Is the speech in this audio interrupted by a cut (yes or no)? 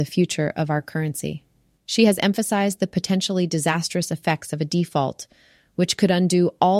yes